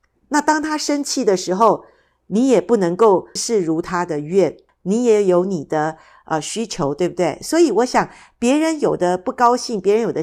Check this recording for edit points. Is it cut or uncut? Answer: cut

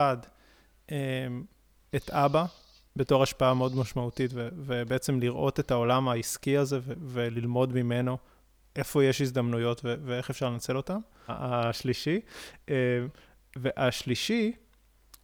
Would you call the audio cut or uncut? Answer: cut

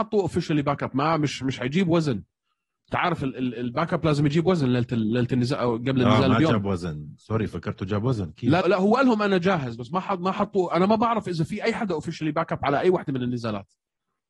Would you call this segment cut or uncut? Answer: cut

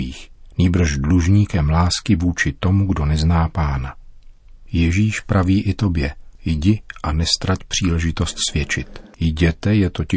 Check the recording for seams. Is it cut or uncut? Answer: cut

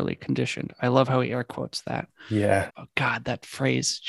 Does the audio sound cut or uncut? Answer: cut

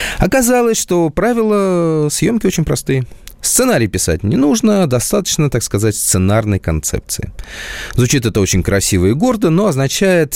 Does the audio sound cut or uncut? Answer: uncut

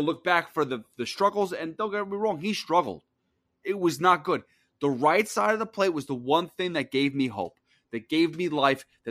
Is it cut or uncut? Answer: uncut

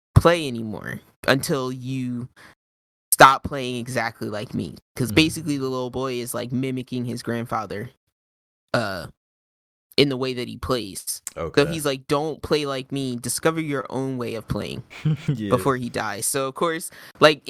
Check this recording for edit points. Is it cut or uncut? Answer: uncut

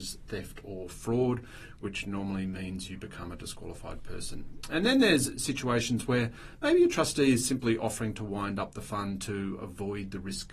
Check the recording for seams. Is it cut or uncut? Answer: uncut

